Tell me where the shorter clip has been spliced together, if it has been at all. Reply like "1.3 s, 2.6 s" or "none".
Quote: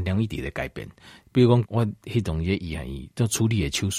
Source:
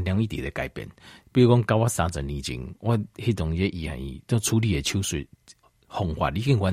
1.6 s